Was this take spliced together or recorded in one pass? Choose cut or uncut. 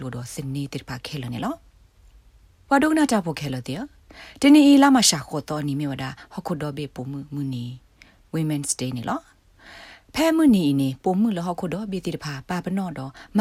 uncut